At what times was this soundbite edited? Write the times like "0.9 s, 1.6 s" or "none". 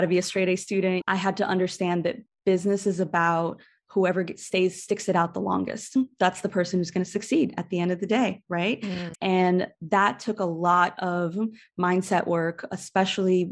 1.0 s, 9.1 s